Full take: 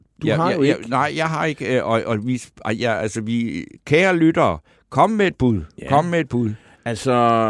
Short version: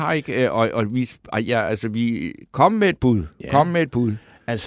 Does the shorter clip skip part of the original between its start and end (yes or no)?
yes